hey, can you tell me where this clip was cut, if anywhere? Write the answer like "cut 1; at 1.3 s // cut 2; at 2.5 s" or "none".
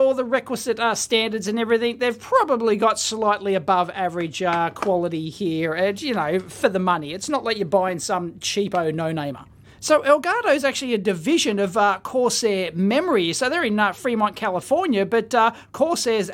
none

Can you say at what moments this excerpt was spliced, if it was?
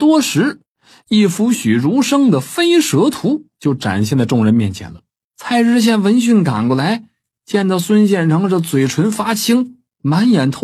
cut 1; at 1.5 s // cut 2; at 5.2 s

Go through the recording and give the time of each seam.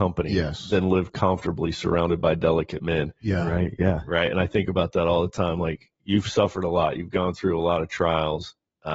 none

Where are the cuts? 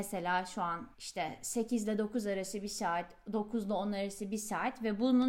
cut 1; at 0.9 s

